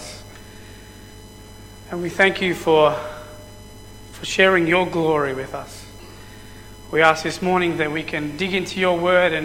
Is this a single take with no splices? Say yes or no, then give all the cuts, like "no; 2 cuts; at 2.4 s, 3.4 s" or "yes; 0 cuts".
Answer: yes; 0 cuts